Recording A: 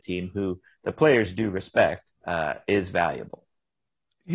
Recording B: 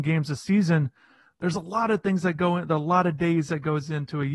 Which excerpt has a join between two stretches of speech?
A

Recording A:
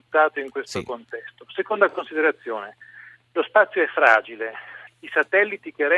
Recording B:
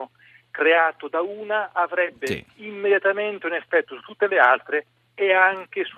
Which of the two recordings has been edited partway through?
A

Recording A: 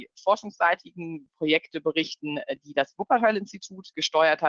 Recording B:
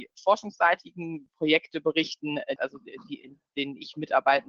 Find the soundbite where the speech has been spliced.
B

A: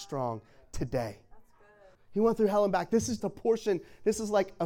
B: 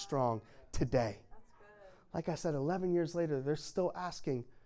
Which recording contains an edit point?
A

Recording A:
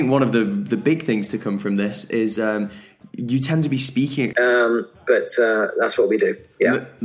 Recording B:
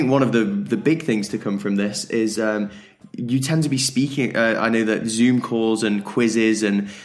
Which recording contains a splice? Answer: A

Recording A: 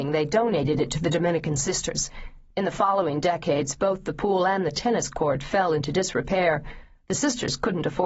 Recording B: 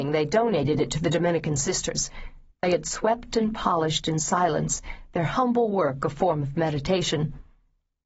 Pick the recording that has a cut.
B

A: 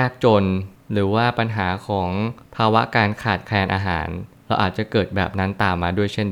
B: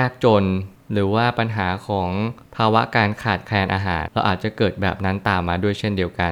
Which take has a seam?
B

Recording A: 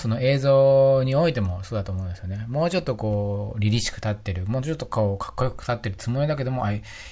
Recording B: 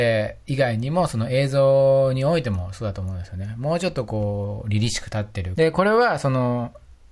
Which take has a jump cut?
B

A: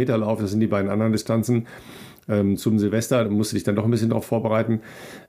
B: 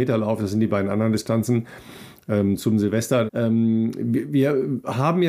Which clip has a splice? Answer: B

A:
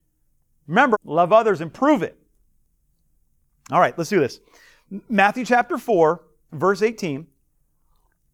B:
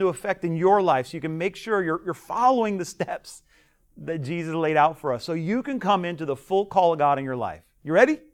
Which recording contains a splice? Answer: A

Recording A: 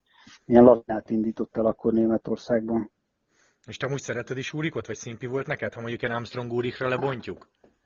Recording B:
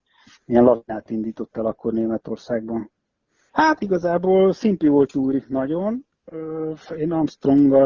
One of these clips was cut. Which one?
B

